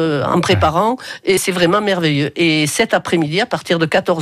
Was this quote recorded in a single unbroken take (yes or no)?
yes